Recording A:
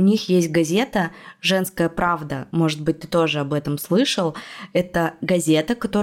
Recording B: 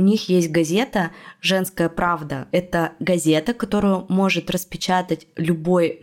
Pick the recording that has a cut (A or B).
B